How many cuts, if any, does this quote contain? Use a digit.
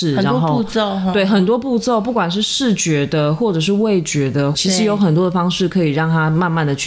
1